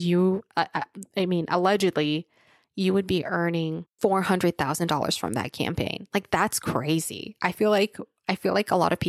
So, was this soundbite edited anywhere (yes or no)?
no